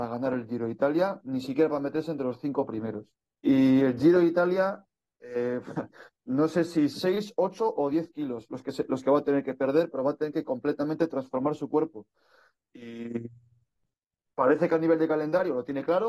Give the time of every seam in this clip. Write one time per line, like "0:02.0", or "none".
0:03.4
0:06.1